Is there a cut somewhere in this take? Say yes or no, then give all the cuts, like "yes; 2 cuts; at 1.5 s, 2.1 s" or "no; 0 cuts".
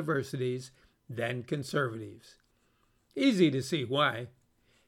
no; 0 cuts